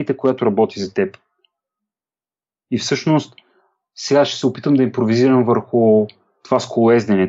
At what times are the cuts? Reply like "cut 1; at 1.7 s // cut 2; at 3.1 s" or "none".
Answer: none